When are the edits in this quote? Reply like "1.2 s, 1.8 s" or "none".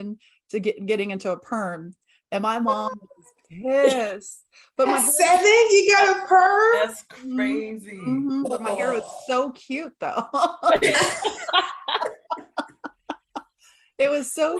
none